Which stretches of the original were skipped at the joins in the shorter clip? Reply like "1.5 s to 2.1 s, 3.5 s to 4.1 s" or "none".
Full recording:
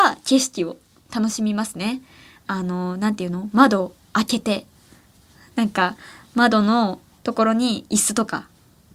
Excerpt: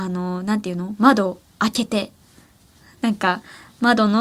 none